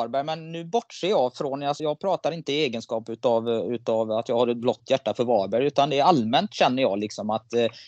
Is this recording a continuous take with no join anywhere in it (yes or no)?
no